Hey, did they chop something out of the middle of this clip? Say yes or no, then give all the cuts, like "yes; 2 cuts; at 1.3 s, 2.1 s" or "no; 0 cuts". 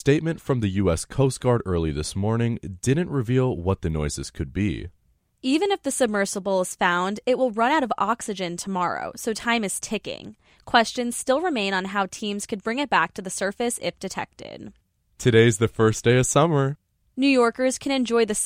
no; 0 cuts